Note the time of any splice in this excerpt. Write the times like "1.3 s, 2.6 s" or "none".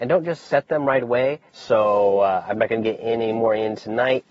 1.5 s